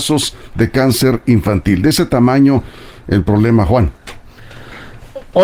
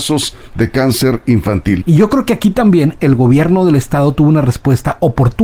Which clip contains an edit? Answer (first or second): second